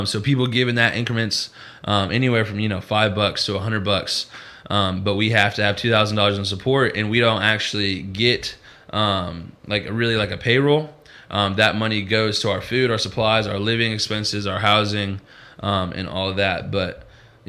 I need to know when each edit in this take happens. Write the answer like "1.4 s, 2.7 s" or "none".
none